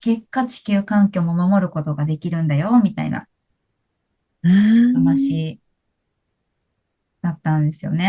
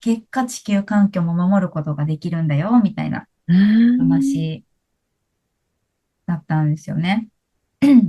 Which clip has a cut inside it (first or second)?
second